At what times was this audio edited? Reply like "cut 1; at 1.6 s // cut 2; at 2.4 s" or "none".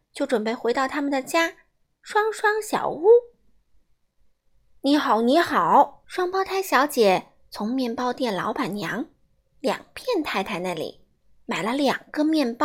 cut 1; at 4.0 s // cut 2; at 6.0 s